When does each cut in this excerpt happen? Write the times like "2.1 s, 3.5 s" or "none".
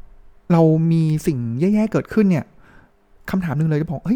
none